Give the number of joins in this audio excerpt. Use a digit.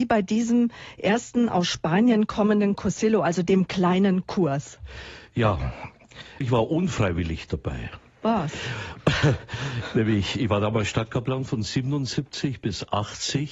1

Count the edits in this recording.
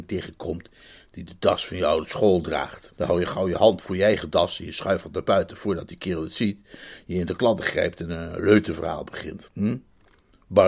1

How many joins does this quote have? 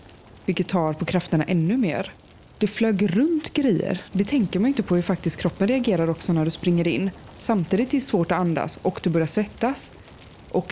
1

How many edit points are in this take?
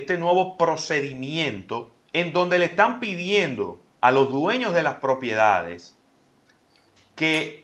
1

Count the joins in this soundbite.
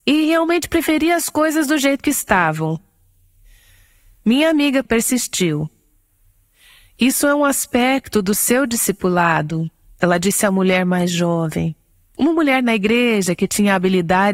2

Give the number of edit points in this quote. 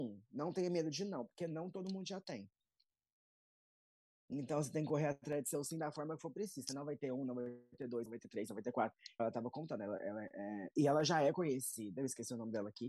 1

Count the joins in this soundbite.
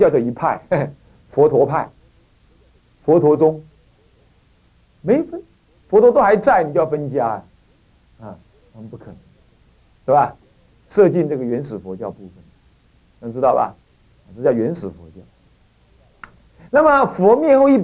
1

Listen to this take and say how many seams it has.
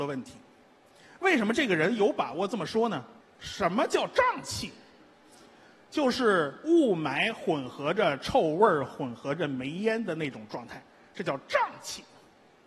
1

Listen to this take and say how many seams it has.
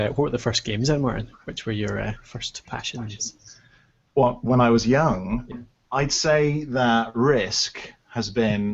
1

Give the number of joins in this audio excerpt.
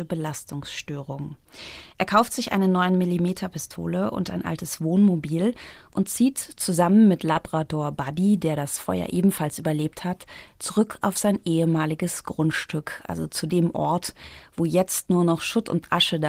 0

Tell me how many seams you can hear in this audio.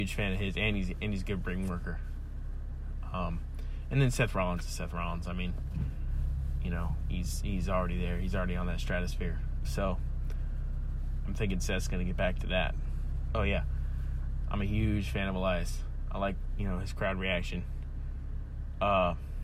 3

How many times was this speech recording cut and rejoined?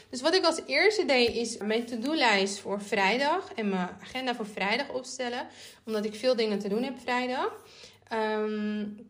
1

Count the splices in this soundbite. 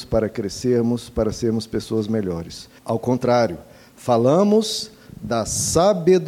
1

